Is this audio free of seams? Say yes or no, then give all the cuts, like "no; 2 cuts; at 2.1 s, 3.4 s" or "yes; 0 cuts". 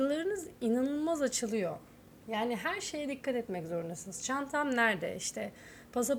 yes; 0 cuts